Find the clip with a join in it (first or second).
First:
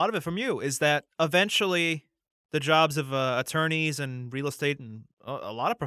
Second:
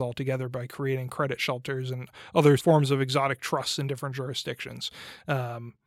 second